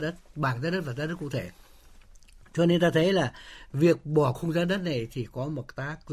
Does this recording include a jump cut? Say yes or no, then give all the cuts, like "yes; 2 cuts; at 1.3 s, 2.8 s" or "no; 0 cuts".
no; 0 cuts